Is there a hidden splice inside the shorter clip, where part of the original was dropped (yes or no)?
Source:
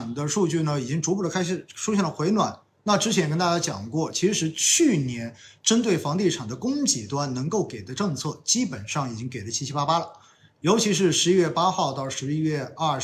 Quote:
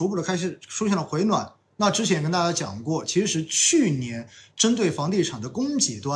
no